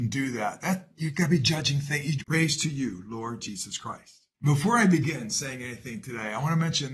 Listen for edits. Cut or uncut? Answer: cut